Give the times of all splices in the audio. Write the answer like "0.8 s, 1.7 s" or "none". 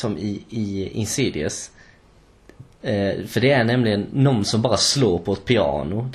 2.7 s